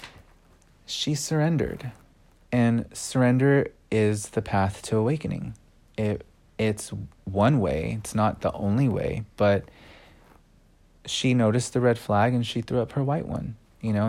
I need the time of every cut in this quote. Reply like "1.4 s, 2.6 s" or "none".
none